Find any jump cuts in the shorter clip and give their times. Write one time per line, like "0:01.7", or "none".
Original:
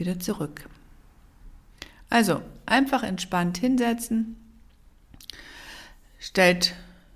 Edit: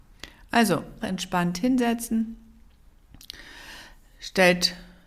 0:01.0

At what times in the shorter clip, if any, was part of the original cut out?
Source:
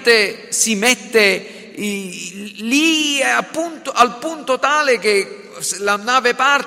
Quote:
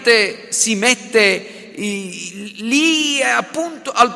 none

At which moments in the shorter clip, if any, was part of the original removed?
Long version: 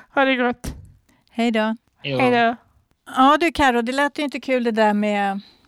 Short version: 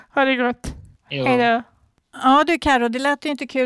0:01.0

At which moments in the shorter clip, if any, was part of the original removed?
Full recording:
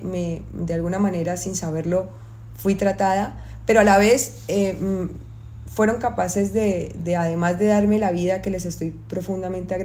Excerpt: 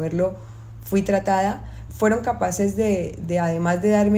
0:01.9

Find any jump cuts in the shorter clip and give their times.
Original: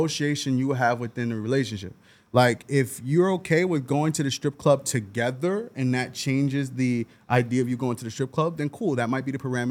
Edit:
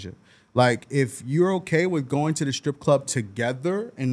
none

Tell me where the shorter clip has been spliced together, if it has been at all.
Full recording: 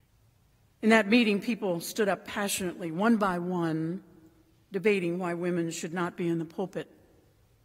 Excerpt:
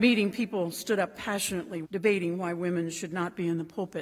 0:01.8

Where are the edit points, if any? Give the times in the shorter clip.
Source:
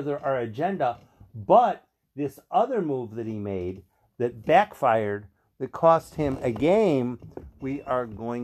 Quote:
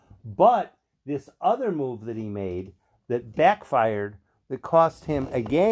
none

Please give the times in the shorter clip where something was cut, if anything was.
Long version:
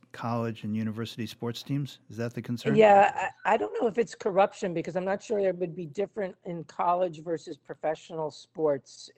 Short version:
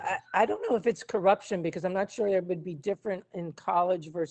none

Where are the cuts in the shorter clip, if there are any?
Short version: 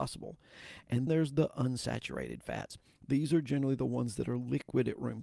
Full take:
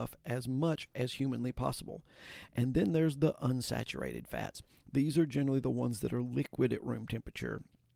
0:01.1

